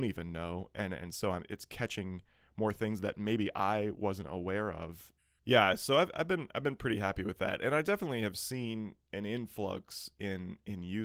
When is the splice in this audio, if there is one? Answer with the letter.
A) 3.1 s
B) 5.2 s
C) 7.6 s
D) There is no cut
B